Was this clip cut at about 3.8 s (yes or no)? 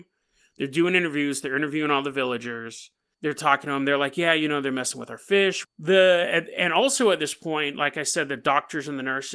no